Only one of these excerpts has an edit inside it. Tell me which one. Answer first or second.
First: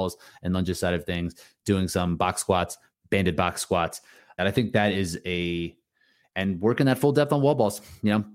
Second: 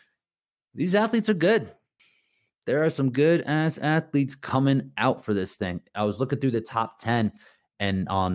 first